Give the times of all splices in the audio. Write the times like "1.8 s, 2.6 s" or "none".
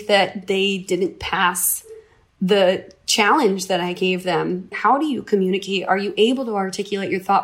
4.7 s